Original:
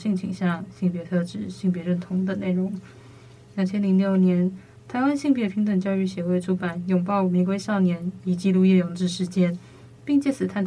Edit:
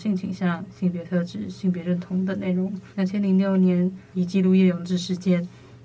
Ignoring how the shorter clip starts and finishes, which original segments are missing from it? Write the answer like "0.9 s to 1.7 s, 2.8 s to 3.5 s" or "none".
2.9 s to 3.5 s, 4.7 s to 8.2 s